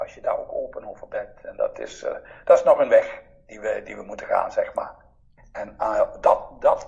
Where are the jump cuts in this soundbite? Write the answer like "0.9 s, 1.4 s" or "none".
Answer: 5.4 s